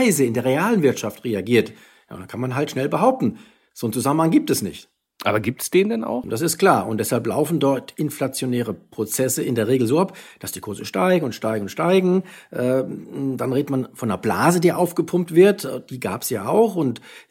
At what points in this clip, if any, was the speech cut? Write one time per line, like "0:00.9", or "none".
0:06.2

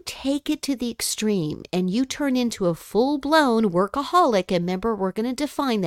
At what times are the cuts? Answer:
none

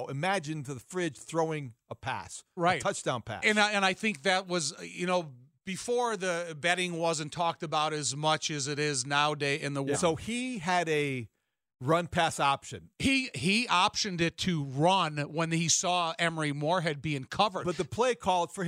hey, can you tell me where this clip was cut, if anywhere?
0:09.9
0:12.9

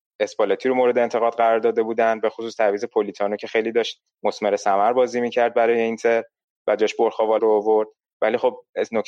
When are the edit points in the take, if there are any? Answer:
0:07.4

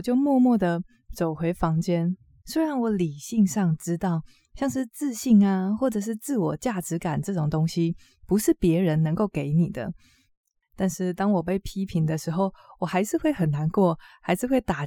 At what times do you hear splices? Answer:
0:02.4

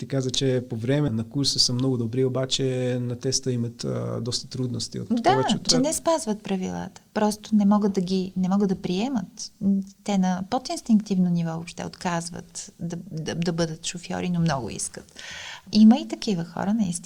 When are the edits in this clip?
0:01.1
0:05.7

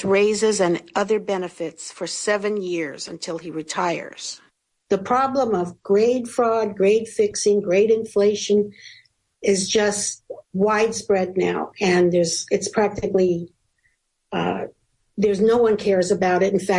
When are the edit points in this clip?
0:10.4

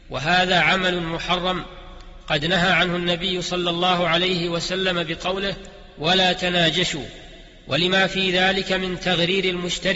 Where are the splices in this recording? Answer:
none

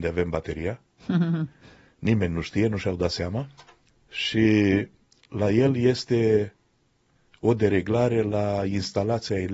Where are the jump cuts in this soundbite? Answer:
none

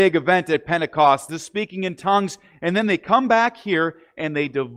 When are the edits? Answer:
0:01.3

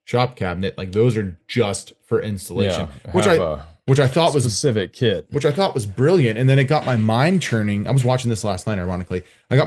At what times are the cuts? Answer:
none

